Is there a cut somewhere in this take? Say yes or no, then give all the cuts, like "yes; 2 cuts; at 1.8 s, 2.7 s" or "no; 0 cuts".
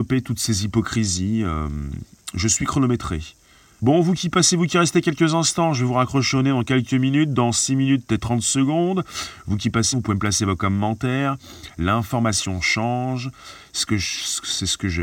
yes; 2 cuts; at 3.8 s, 9.9 s